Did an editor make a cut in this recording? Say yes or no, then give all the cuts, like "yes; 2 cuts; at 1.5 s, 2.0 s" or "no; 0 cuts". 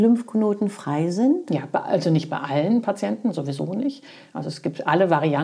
no; 0 cuts